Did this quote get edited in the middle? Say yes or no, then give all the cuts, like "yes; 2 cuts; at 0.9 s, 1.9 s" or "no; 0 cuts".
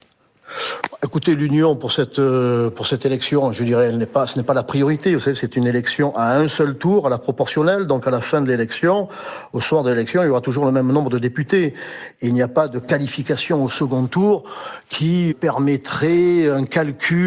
yes; 1 cut; at 15.3 s